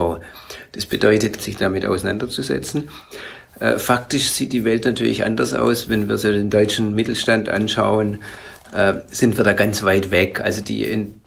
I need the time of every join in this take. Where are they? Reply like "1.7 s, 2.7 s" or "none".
1.4 s